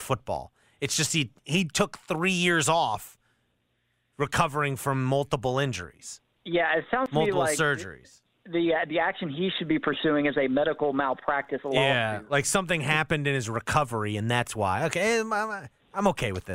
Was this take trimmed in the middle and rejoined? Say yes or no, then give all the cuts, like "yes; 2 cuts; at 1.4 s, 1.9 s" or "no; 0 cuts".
no; 0 cuts